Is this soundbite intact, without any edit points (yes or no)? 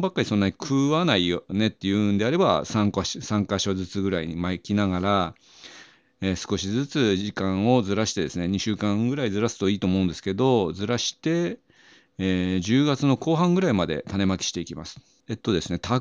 yes